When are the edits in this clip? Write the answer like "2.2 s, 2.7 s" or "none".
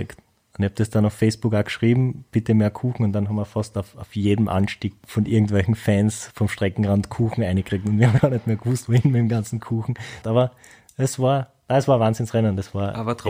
8.2 s, 10.2 s